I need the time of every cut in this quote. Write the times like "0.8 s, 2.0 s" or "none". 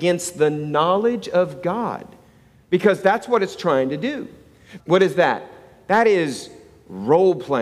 4.8 s